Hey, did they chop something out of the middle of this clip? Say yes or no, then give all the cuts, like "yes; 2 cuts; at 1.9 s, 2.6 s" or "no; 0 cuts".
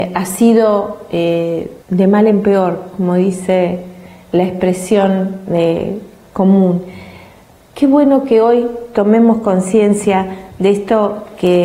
yes; 1 cut; at 1.8 s